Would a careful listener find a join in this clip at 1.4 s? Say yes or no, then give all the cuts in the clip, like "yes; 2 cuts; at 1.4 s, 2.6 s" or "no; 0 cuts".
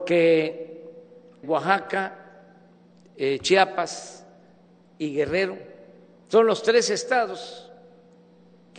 yes; 1 cut; at 1.4 s